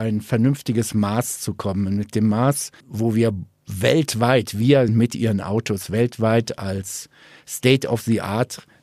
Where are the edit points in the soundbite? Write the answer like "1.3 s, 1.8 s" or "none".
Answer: 2.8 s, 4.9 s